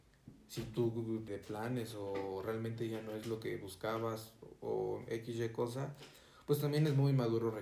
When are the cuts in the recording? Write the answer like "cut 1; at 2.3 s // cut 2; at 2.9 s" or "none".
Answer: cut 1; at 1.3 s

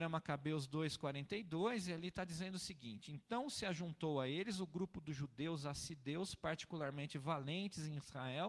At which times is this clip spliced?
none

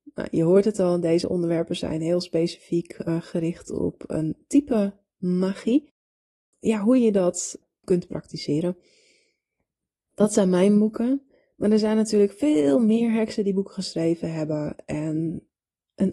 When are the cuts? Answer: none

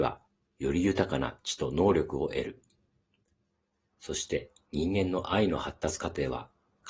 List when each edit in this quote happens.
cut 1; at 3.9 s

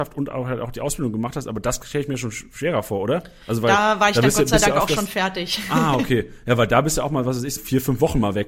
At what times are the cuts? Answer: cut 1; at 7.6 s

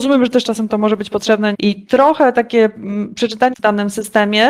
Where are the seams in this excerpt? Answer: cut 1; at 1.5 s // cut 2; at 3.5 s

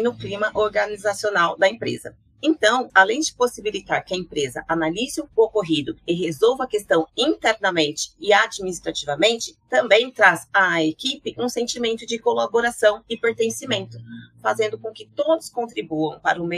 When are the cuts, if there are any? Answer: cut 1; at 2.9 s

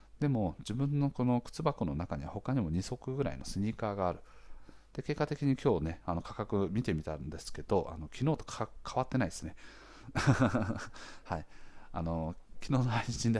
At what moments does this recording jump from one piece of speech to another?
cut 1; at 4.9 s

